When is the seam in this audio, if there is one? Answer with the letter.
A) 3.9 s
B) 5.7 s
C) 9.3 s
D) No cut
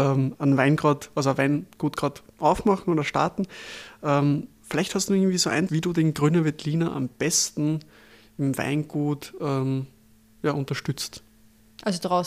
B